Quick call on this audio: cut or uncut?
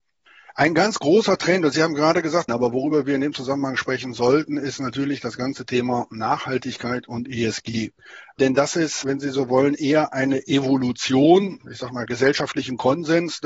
cut